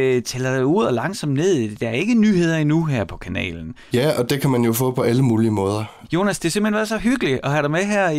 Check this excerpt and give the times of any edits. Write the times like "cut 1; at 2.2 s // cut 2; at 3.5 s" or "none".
cut 1; at 3.9 s // cut 2; at 6.0 s